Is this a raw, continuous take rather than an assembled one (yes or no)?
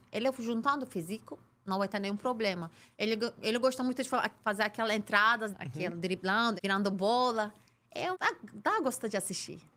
no